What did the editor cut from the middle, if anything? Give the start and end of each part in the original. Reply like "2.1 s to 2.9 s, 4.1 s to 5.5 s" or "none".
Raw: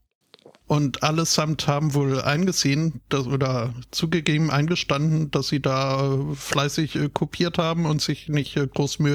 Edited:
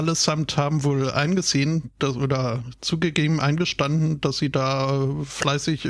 none